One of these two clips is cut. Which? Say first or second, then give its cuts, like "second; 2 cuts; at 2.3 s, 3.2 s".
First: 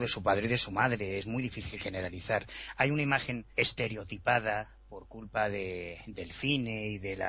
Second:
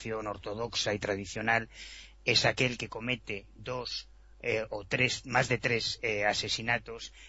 first; 1 cut; at 3.5 s